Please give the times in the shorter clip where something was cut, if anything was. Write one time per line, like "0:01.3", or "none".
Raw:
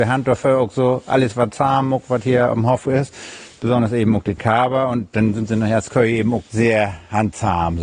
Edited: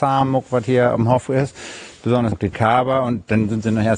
0:02.3